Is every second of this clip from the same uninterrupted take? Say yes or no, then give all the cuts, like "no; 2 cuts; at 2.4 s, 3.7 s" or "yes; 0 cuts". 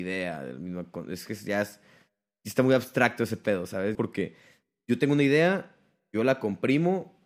no; 1 cut; at 3.9 s